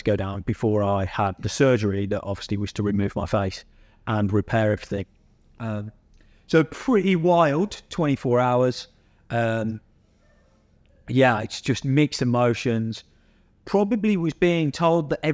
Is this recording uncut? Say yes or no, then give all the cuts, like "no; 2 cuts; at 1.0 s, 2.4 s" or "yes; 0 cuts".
yes; 0 cuts